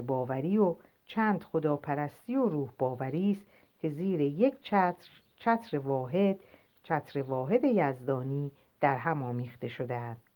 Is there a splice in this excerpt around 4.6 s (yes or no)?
no